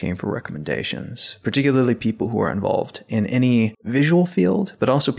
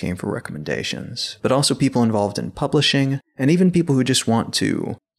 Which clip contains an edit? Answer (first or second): second